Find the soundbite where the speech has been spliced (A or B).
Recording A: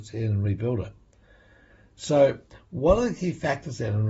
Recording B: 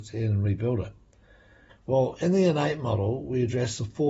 B